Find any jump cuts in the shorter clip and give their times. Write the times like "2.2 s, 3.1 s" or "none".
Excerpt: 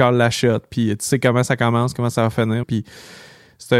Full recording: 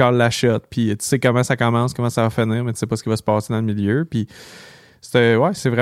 2.6 s